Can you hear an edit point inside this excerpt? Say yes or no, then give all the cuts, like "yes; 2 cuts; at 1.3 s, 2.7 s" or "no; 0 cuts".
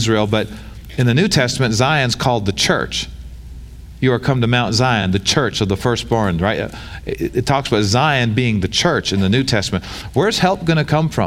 no; 0 cuts